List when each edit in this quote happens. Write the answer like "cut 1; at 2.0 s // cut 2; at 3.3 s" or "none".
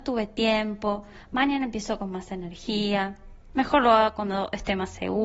cut 1; at 3.5 s